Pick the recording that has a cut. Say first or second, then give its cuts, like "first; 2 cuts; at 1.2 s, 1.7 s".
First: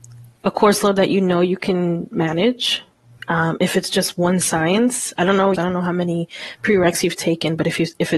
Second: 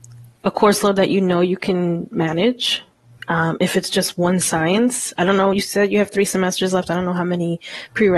first; 1 cut; at 5.5 s